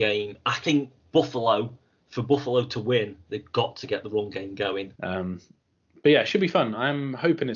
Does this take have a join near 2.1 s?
no; 1 cut; at 5.0 s

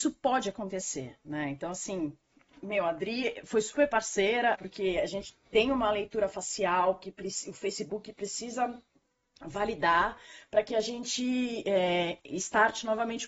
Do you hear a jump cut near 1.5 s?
no; 1 cut; at 4.5 s

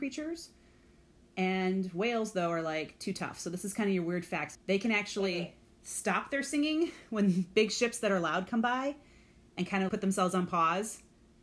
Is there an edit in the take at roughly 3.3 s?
no; 2 cuts; at 4.5 s, 9.9 s

